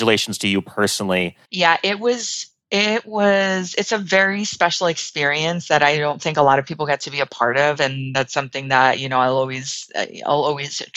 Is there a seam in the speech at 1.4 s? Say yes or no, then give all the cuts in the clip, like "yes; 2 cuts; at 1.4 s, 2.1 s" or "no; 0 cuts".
yes; 1 cut; at 1.4 s